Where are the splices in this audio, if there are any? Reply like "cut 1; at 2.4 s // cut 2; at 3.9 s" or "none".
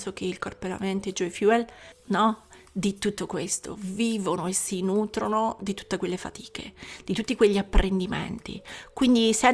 cut 1; at 1.9 s